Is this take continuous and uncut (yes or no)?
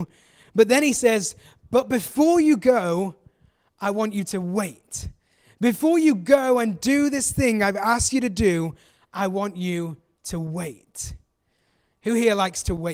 yes